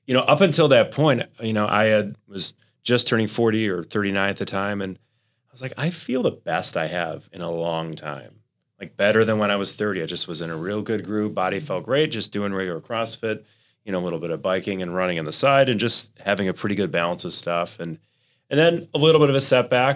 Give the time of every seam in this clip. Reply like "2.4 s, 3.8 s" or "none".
none